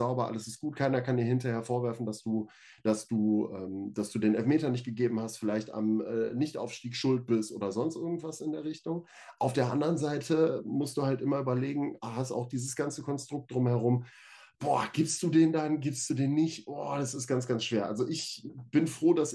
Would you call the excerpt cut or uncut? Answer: uncut